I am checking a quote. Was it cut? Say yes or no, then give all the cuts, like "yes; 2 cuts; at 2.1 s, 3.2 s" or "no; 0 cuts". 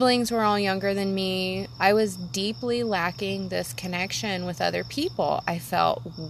yes; 1 cut; at 1.8 s